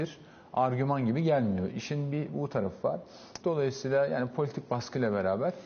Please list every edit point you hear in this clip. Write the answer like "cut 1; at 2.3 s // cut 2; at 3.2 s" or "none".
cut 1; at 3.4 s